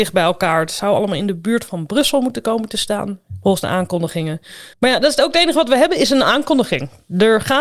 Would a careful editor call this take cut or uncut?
cut